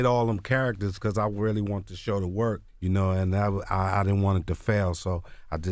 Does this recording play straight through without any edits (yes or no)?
no